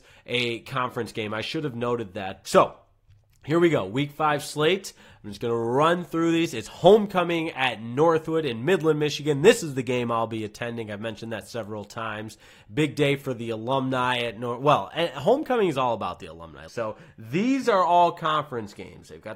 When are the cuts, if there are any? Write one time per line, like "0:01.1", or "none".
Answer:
0:02.4
0:16.7